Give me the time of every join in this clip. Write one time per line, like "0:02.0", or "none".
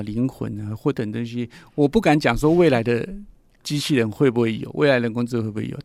0:00.9